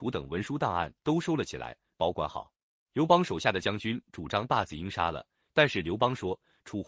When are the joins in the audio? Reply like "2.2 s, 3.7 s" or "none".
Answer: 2.8 s